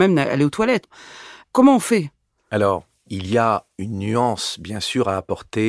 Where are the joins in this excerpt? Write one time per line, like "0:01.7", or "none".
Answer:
none

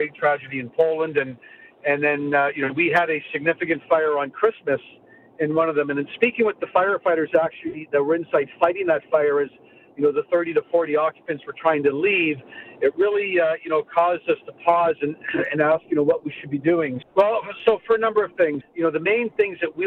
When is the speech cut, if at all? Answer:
0:17.0
0:18.6

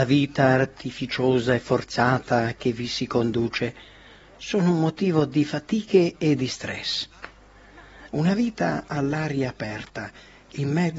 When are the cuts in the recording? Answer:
0:08.1

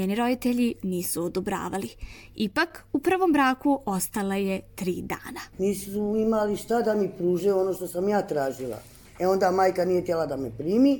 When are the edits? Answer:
0:05.5
0:09.0

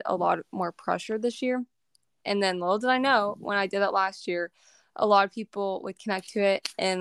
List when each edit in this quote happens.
0:02.2

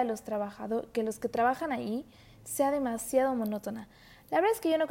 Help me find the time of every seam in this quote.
none

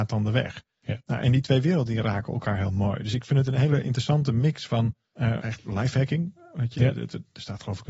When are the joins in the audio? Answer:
0:05.4
0:06.8

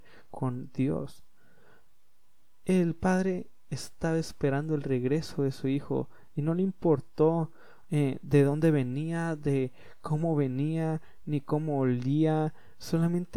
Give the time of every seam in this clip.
none

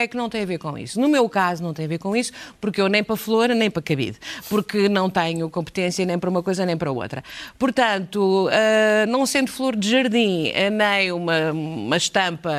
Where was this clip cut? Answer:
none

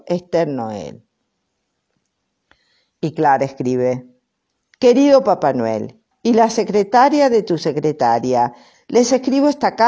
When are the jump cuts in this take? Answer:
0:06.1
0:08.7

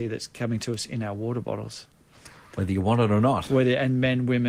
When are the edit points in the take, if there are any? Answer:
none

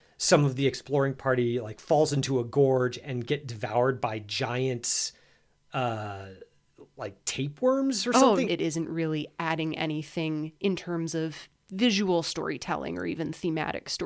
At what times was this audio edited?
0:08.4

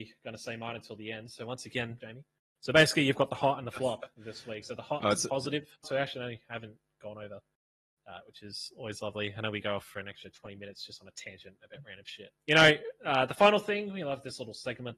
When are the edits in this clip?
0:02.0
0:05.8
0:12.4

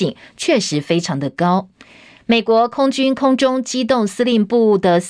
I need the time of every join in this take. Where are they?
none

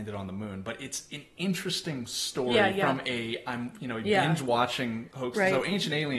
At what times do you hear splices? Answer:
none

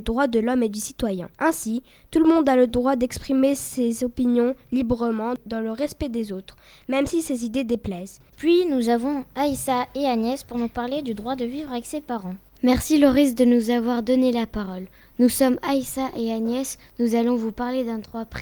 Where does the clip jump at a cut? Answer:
0:01.3
0:08.3

